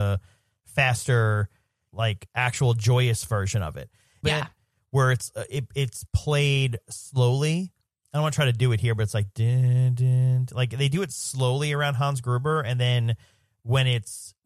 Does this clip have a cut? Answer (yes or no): yes